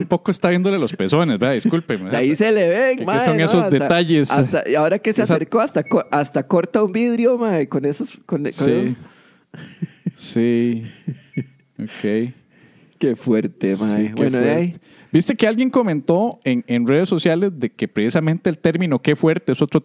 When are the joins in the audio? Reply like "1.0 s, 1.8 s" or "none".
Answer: none